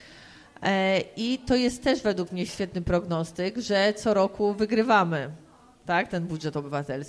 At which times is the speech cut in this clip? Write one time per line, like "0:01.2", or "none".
0:02.5